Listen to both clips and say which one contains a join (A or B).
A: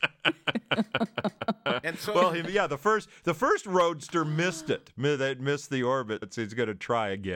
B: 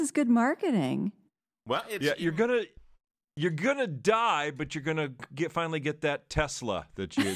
A